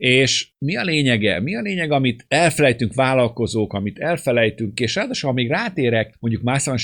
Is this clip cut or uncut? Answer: uncut